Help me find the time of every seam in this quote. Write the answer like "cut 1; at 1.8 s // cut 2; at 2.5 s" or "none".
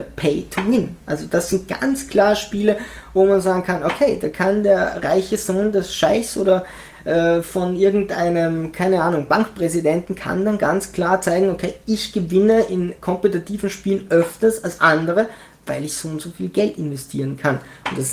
none